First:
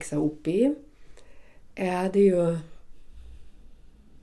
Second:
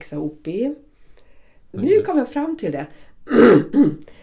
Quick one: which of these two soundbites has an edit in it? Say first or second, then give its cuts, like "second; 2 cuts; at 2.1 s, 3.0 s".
second; 1 cut; at 1.7 s